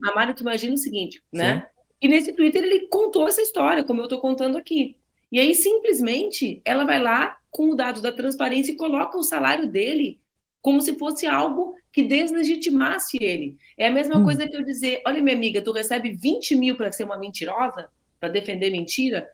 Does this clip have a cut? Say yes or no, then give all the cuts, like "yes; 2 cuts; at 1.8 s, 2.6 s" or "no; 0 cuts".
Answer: yes; 1 cut; at 1.3 s